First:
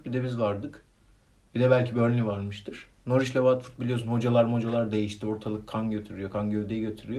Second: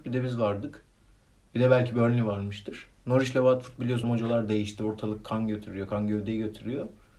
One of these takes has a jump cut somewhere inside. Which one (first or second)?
second